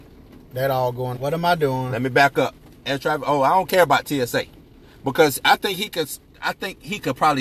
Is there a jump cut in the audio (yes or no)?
yes